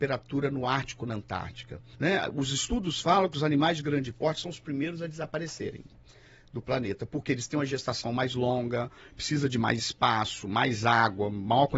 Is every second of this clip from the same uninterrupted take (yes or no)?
no